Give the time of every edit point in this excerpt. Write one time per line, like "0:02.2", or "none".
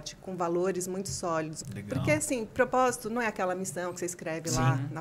0:01.6